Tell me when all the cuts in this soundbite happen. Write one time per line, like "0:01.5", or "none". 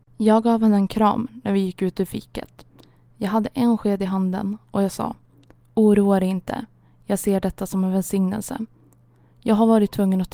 none

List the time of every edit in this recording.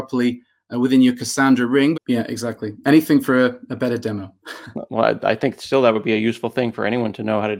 0:01.9

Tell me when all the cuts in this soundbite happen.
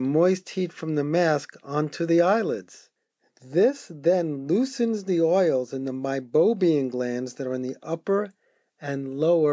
none

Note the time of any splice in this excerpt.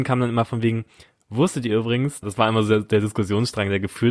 0:02.2

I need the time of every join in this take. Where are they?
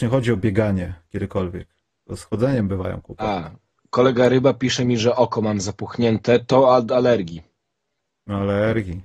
none

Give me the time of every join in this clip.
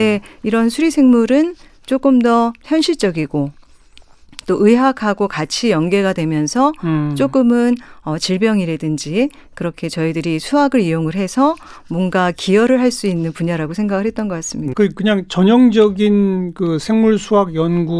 0:14.7

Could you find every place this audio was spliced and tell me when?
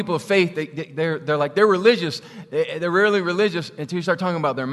none

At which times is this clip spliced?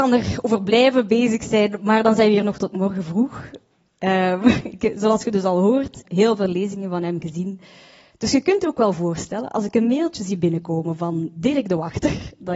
0:06.0

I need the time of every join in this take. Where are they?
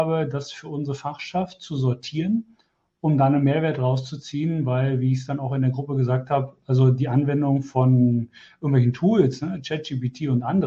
none

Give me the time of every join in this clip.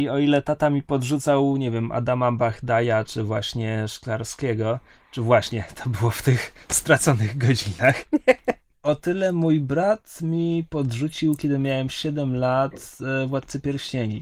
none

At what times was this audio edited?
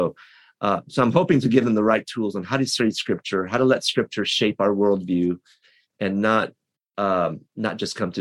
none

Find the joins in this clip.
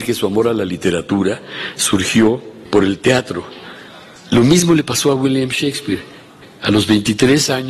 none

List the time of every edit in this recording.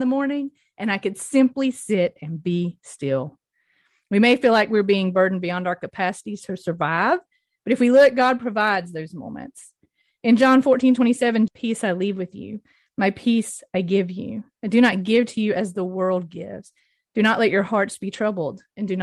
0:11.5

